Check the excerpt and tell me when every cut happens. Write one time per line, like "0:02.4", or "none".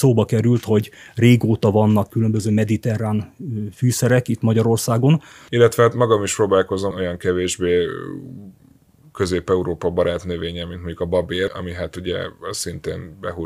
0:05.5
0:06.9
0:11.5